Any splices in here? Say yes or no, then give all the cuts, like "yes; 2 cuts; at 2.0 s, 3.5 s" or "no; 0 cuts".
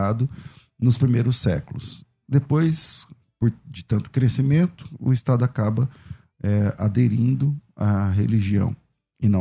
no; 0 cuts